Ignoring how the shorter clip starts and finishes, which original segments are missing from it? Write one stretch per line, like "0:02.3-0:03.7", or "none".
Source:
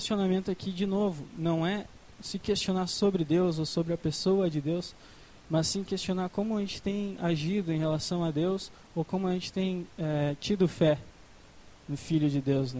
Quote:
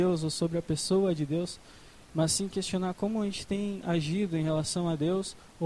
none